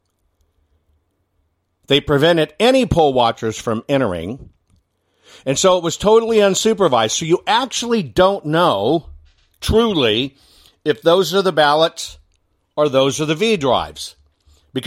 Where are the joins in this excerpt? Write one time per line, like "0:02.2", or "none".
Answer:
none